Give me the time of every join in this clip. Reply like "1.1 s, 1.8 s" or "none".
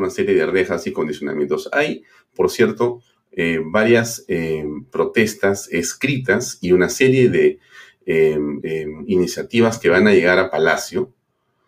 8.6 s